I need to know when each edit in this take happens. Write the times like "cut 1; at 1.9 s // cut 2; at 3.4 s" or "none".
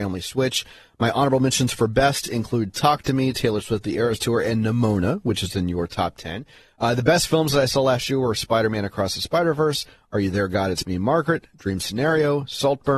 none